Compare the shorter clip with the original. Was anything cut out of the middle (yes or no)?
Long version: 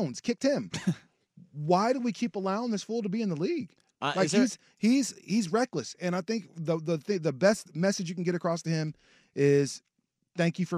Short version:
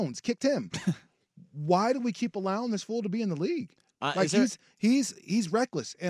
no